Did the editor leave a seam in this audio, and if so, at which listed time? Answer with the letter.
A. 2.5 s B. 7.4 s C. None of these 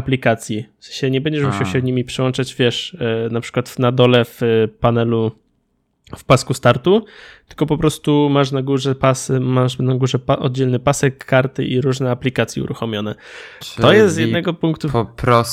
C